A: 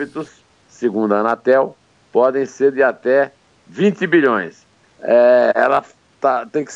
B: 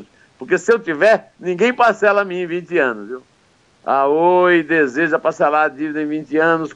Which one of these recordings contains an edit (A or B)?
A